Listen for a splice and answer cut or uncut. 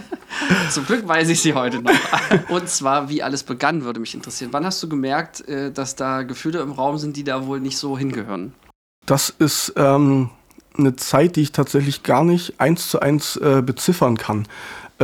uncut